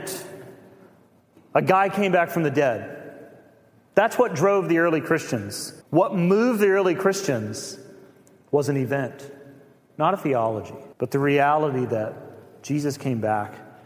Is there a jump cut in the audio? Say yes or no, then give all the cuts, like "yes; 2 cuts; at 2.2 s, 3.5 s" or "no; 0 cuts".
yes; 2 cuts; at 5.8 s, 10.9 s